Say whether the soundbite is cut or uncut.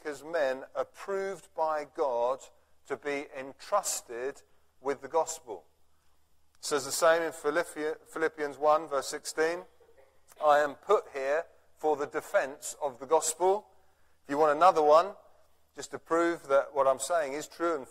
uncut